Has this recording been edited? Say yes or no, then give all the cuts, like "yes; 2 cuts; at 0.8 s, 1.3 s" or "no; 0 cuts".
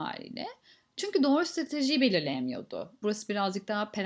yes; 1 cut; at 3.0 s